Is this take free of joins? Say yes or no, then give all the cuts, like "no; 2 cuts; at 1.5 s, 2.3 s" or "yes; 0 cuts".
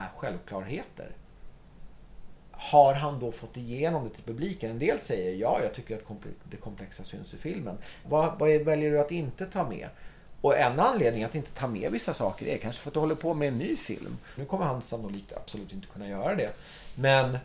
no; 2 cuts; at 8.0 s, 14.4 s